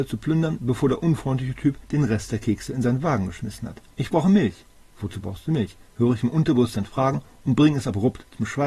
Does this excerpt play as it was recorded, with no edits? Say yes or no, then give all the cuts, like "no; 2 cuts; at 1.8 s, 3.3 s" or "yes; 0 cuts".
no; 1 cut; at 3.9 s